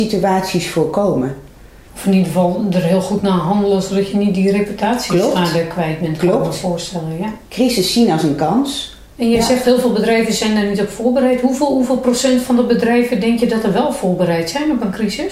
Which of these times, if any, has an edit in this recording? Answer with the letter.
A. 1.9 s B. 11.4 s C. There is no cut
A